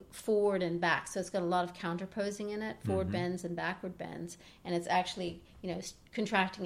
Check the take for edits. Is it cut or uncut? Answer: uncut